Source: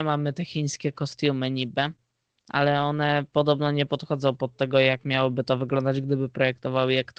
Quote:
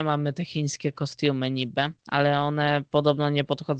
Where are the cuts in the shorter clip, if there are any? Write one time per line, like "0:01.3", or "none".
0:02.0